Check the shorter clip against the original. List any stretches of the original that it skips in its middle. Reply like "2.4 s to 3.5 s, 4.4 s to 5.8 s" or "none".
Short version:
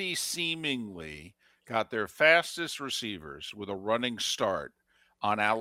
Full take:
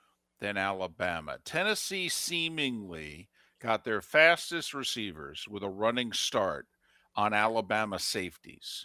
none